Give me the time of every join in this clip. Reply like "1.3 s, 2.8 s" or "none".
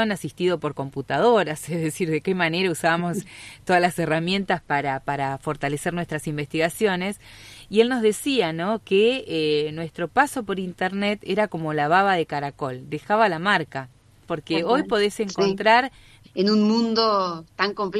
14.2 s, 16.2 s